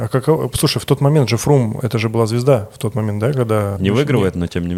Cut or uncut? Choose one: cut